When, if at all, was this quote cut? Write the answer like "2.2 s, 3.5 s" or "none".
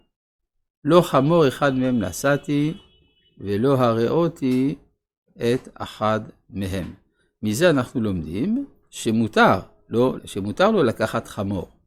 10.2 s